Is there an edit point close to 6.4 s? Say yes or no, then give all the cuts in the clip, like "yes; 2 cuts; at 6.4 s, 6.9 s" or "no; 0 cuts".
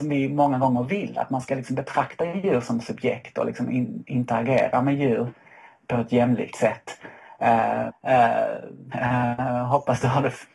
no; 2 cuts; at 7.9 s, 8.9 s